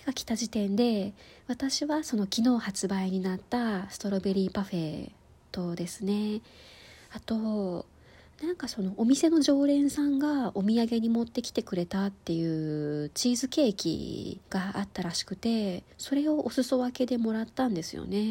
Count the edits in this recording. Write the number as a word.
two